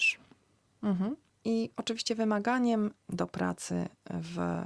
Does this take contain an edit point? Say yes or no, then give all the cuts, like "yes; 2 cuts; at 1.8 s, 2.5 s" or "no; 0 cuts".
no; 0 cuts